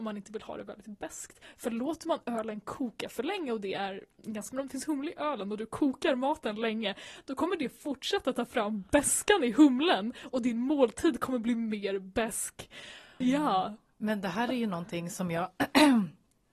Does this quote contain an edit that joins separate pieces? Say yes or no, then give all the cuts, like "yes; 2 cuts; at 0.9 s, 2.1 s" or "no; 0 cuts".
yes; 2 cuts; at 4.5 s, 13.2 s